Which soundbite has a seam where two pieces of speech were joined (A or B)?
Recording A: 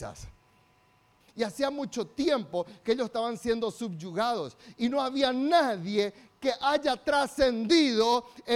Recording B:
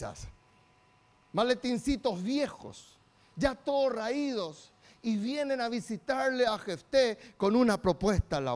A